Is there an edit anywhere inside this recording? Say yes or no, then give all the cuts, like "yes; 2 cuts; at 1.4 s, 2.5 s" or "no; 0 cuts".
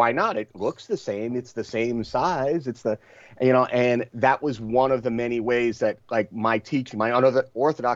no; 0 cuts